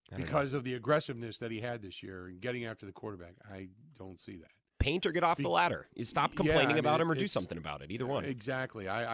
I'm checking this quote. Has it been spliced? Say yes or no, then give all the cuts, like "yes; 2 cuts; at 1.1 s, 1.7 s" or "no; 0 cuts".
no; 0 cuts